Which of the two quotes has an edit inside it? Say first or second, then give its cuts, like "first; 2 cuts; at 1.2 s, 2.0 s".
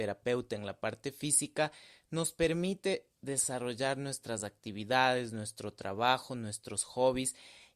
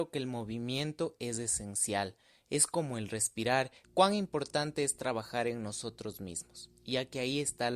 second; 1 cut; at 3.8 s